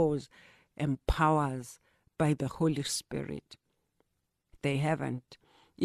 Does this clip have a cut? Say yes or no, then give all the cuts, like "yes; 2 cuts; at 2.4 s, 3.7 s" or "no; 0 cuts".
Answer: yes; 1 cut; at 4.5 s